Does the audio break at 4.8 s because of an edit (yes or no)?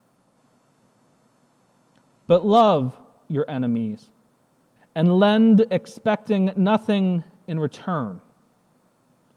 yes